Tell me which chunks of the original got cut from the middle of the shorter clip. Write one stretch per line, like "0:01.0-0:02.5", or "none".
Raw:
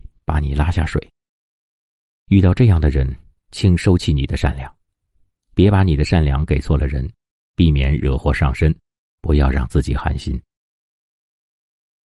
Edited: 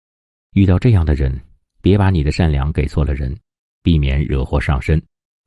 0:03.4-0:05.4